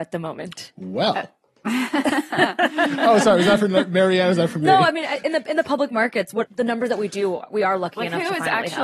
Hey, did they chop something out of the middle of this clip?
yes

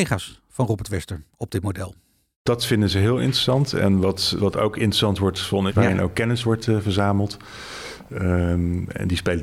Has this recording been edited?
yes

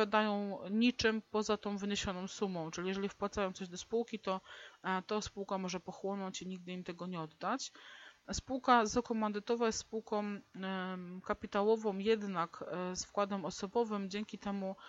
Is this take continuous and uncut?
no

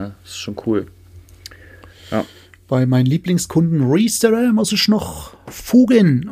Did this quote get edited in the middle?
no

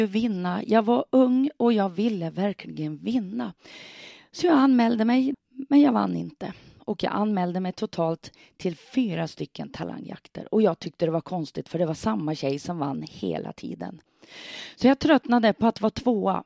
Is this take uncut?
no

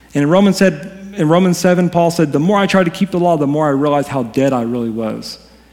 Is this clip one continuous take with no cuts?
yes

